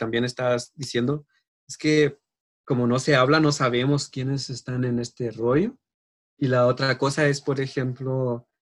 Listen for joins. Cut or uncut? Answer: uncut